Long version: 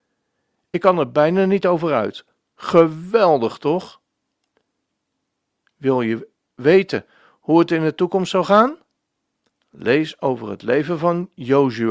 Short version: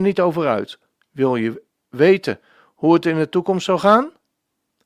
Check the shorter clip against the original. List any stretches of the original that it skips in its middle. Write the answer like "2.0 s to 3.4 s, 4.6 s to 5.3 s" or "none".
2.4 s to 5.6 s